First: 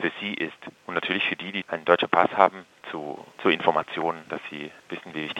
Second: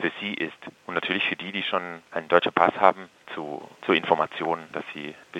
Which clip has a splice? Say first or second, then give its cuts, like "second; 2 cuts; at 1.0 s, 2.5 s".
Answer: first; 1 cut; at 1.6 s